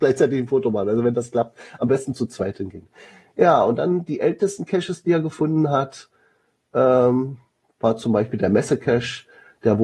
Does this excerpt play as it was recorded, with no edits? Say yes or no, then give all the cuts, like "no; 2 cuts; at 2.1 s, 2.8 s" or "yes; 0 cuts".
yes; 0 cuts